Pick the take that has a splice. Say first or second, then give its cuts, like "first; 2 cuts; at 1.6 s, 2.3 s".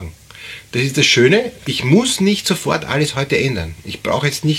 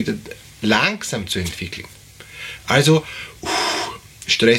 first; 1 cut; at 1.6 s